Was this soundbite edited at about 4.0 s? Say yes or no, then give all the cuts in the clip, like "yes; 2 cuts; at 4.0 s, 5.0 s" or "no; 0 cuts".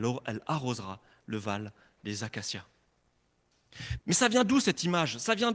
yes; 1 cut; at 4.0 s